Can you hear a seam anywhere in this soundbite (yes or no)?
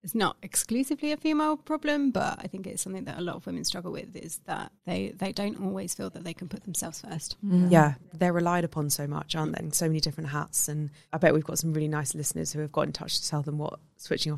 yes